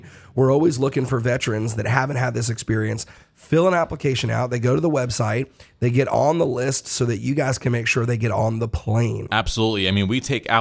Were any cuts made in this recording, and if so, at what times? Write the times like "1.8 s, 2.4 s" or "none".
9.3 s